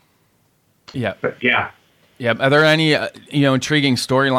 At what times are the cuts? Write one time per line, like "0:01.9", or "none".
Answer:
0:00.9